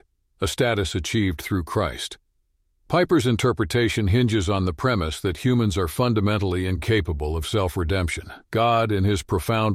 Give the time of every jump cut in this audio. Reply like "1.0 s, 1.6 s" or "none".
8.5 s